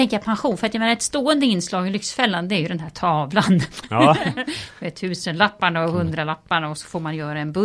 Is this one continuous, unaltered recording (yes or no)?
yes